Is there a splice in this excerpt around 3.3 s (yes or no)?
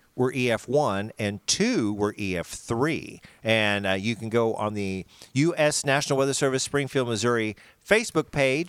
no